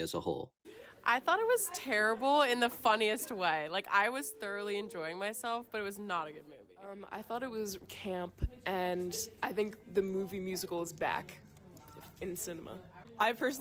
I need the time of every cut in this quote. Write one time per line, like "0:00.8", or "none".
0:07.8